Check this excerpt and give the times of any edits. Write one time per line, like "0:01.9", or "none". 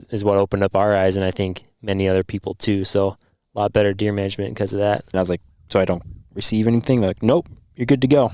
0:05.1